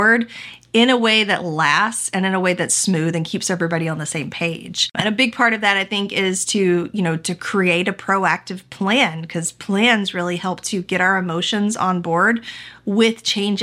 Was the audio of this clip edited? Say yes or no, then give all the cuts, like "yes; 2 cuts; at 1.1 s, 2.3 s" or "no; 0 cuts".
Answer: no; 0 cuts